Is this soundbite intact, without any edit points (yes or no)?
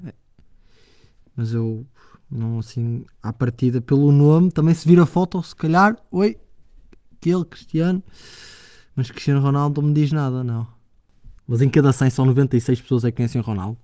no